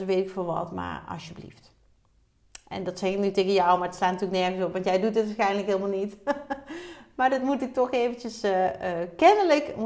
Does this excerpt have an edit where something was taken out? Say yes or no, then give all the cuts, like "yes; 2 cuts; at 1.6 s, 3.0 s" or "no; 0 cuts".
no; 0 cuts